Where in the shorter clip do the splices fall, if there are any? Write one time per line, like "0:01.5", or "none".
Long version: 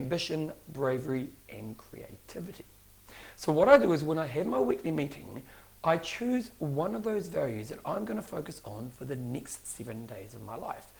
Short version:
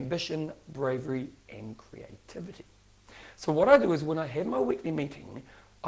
none